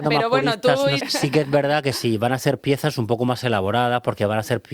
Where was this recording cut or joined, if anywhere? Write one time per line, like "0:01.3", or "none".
0:01.0